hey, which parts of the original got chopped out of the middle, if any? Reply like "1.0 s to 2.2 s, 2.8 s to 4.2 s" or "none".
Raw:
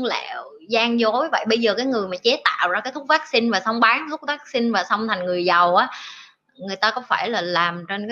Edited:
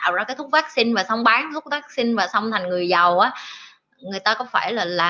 none